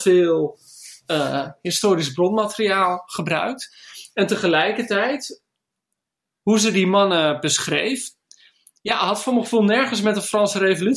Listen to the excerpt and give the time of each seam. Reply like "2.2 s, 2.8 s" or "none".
none